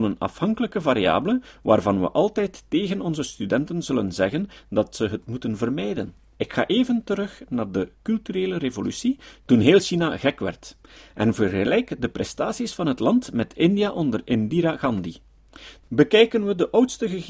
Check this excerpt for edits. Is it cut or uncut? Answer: cut